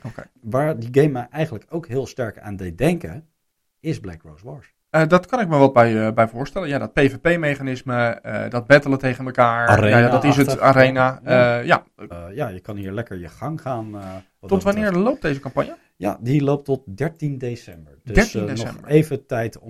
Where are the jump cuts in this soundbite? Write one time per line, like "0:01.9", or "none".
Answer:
0:04.8
0:12.1